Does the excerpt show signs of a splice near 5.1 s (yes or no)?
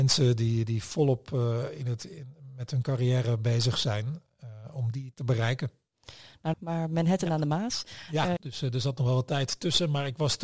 yes